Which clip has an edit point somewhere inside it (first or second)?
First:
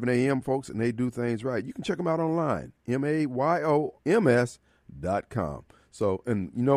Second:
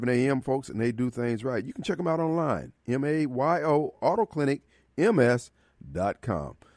first